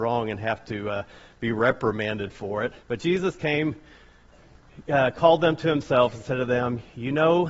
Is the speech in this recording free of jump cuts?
no; 1 cut; at 2.8 s

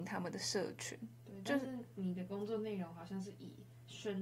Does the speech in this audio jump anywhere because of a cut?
no; 0 cuts

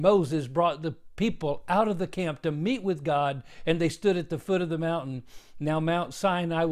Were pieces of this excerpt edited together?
no; 0 cuts

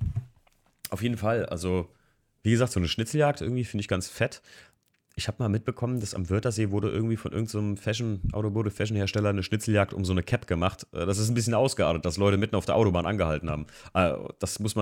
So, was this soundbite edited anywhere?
no; 0 cuts

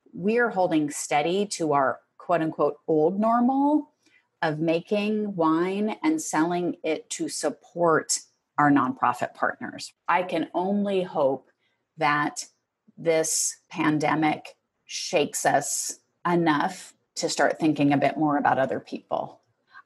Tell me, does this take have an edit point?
yes; 1 cut; at 10.1 s

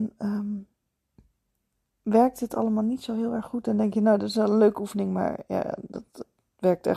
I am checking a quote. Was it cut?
no; 0 cuts

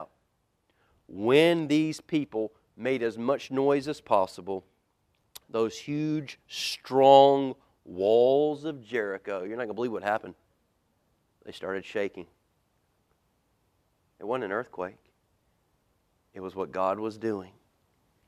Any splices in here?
no; 0 cuts

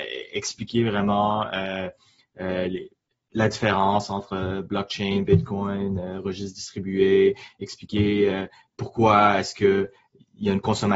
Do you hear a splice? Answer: no; 0 cuts

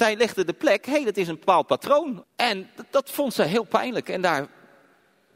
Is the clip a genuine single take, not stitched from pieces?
no; 1 cut; at 2.2 s

